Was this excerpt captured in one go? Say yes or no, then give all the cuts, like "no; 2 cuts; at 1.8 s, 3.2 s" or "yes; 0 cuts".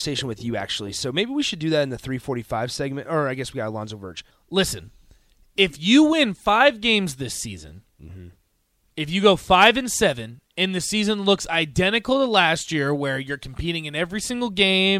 no; 1 cut; at 4.3 s